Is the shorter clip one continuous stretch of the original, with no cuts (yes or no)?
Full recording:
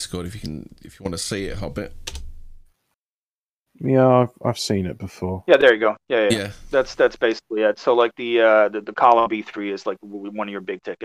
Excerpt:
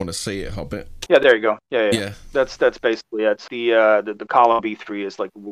no